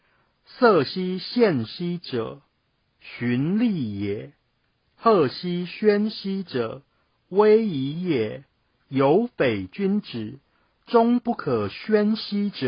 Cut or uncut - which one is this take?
uncut